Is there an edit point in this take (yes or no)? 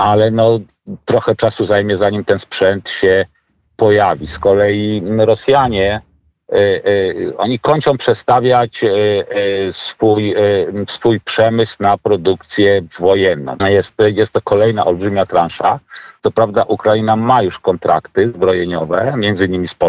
yes